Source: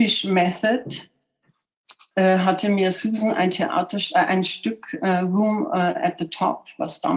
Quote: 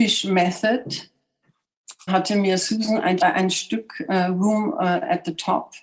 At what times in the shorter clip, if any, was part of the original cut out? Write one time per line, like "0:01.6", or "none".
0:02.1
0:03.2